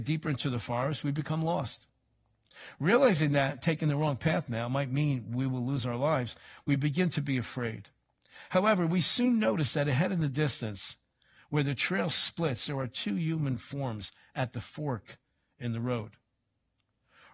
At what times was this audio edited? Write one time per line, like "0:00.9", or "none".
none